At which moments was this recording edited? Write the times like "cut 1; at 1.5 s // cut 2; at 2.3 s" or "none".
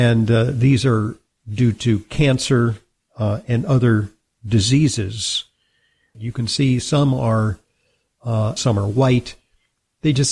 cut 1; at 6.1 s // cut 2; at 8.6 s